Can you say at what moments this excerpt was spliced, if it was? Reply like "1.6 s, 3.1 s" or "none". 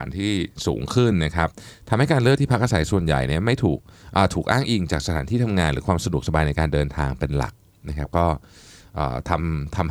none

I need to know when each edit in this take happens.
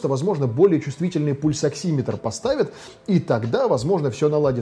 none

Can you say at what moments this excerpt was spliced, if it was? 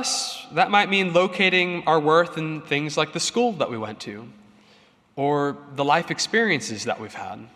none

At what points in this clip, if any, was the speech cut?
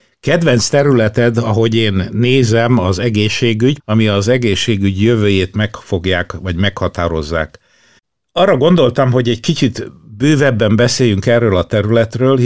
3.8 s

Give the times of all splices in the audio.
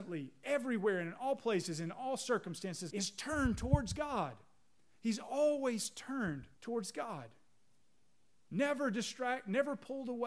2.9 s, 6.5 s

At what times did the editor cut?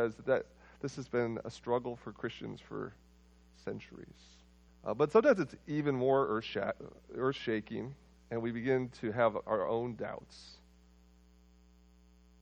4.7 s

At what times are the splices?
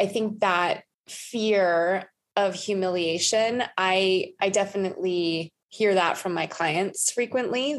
0.9 s, 5.6 s

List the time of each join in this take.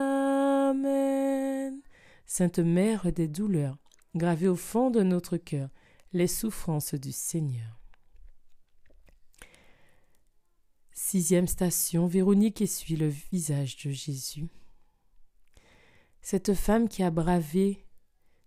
none

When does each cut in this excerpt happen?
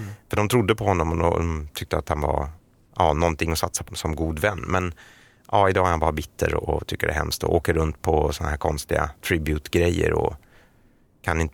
3.9 s

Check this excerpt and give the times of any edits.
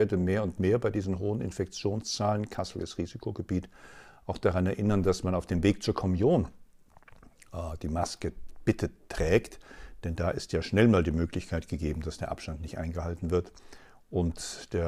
none

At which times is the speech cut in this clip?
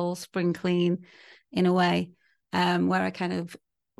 none

